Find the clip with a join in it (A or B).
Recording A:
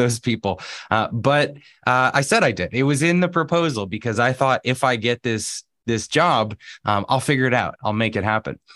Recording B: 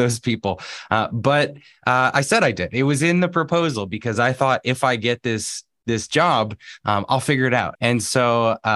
B